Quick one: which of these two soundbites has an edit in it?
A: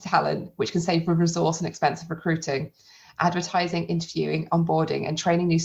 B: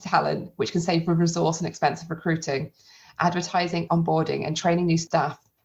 B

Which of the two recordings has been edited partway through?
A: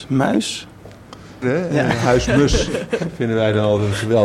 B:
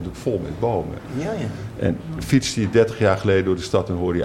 A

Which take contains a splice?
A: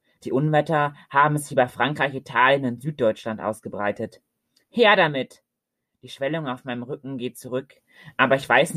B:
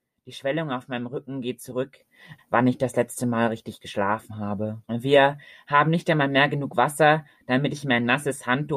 B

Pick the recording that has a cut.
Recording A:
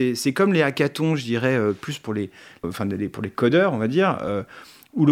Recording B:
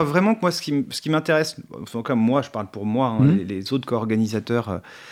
A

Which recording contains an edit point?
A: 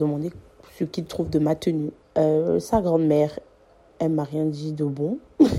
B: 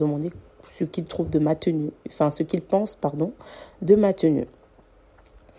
A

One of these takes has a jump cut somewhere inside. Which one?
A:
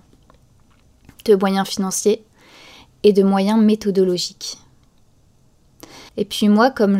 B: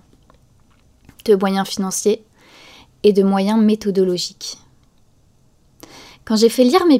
A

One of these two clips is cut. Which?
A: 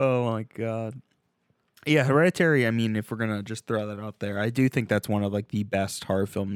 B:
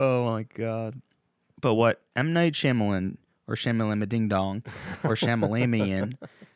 B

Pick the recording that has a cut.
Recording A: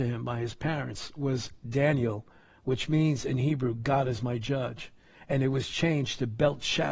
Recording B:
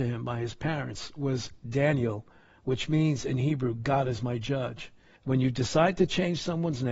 B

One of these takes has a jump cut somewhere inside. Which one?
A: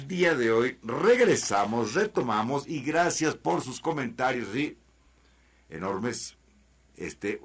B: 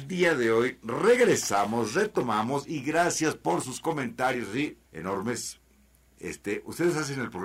B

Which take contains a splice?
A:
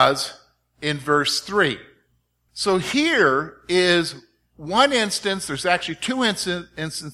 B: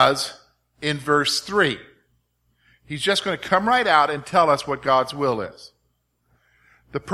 A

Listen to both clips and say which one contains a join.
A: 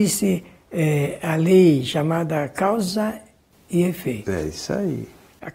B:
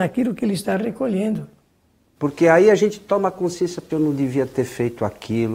B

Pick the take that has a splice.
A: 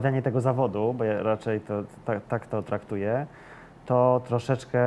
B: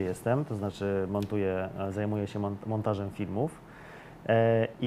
A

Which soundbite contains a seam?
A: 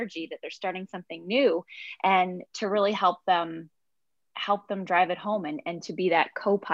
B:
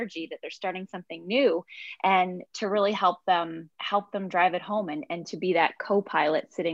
B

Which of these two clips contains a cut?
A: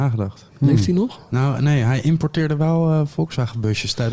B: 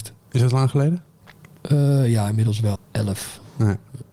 B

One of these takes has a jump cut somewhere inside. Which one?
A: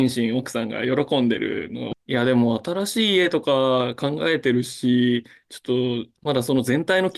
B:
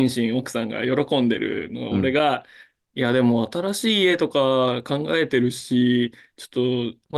A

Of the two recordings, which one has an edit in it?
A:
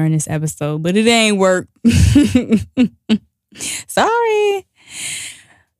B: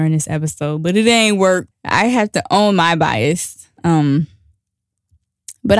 B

